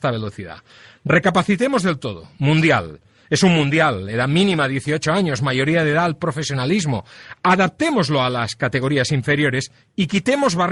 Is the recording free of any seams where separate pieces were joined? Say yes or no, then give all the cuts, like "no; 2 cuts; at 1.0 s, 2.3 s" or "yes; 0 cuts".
yes; 0 cuts